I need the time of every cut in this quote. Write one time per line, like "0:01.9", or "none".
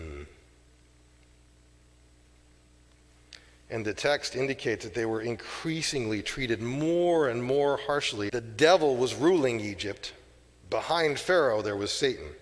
0:08.3